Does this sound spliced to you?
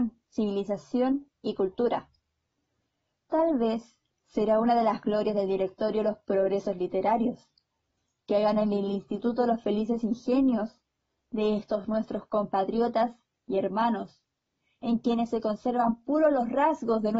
no; 0 cuts

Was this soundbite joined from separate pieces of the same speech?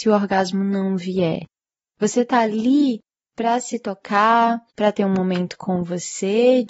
yes; 1 cut; at 4.7 s

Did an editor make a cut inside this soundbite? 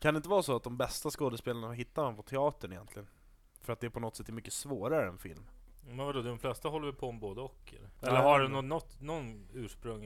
no; 0 cuts

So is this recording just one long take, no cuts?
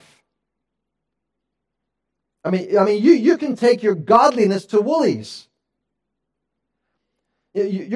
yes; 0 cuts

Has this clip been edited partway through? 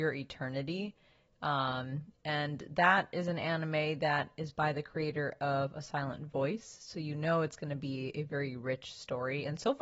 no; 0 cuts

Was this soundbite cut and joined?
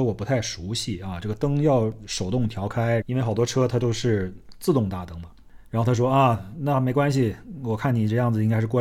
yes; 1 cut; at 3.0 s

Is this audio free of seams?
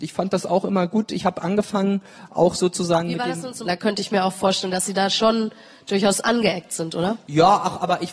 no; 1 cut; at 3.7 s

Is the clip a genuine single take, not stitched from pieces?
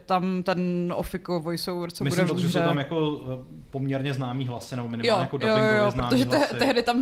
no; 1 cut; at 2.3 s

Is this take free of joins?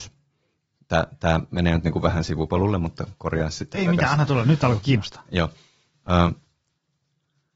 yes; 0 cuts

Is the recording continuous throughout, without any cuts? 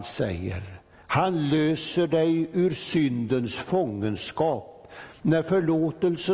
yes; 0 cuts

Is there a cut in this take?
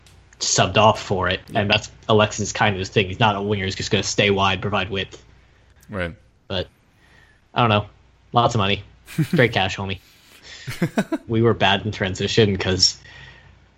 yes; 1 cut; at 11.3 s

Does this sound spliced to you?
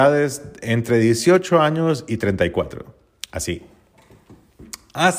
no; 0 cuts

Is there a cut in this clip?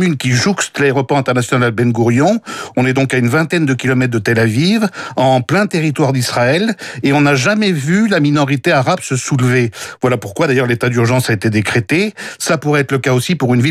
no; 0 cuts

